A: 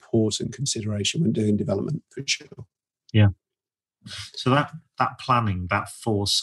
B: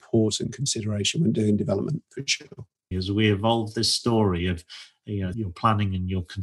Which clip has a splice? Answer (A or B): B